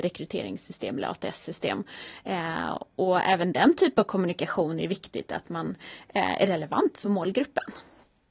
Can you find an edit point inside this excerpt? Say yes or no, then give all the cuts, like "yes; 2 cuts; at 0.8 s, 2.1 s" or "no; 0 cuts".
no; 0 cuts